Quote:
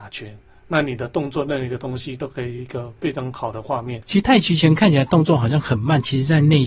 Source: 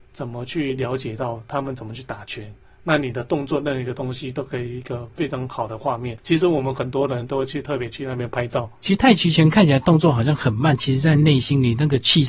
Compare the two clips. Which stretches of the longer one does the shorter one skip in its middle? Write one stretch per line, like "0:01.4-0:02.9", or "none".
0:06.2-0:08.8